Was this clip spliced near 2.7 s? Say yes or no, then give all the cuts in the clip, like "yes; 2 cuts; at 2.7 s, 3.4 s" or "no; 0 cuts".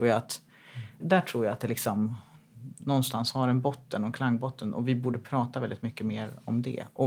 yes; 2 cuts; at 1.0 s, 2.7 s